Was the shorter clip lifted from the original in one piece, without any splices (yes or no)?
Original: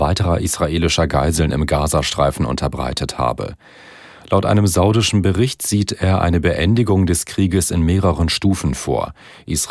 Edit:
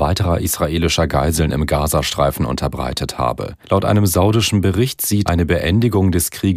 no